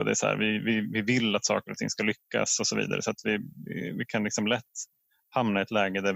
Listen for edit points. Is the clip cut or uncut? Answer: uncut